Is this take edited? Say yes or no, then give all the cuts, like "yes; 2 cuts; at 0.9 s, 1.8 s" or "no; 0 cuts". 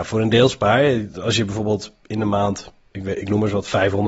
no; 0 cuts